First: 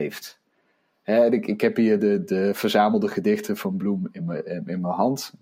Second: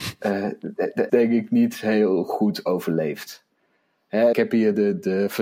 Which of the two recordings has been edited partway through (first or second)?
second